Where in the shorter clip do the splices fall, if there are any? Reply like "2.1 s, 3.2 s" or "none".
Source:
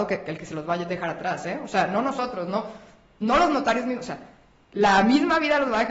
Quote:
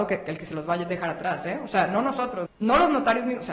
2.5 s